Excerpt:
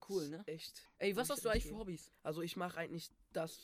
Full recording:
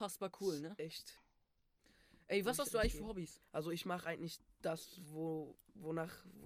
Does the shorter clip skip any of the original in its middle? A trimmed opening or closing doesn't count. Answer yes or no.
yes